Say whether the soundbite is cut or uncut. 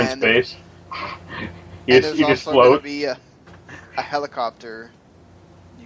uncut